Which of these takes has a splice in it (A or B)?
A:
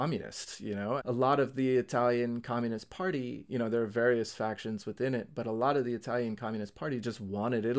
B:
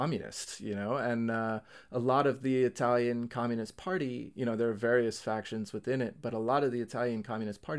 A